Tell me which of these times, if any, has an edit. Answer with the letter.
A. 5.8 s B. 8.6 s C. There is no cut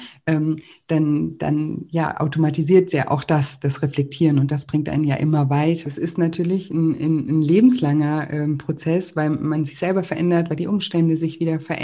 A